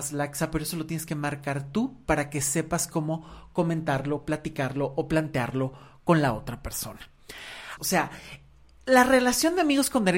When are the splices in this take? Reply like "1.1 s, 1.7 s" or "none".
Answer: 7.8 s